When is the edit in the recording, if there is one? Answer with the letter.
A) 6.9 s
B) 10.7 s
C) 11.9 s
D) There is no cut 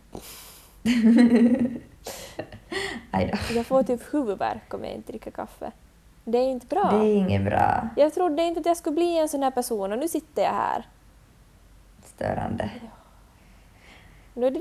D